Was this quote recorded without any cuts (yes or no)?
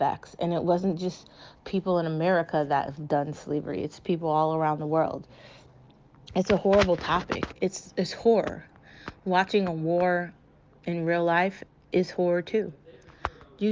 yes